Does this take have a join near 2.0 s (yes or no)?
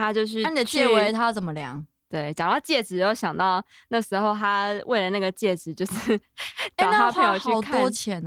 yes